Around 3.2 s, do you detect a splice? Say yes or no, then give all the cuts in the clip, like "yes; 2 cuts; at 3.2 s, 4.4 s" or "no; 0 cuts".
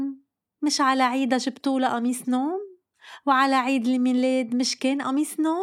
no; 0 cuts